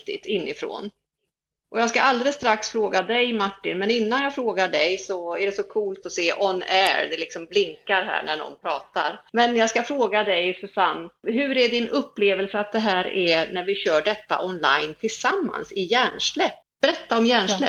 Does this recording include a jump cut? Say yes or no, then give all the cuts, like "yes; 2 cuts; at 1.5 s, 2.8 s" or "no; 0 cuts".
yes; 1 cut; at 16.6 s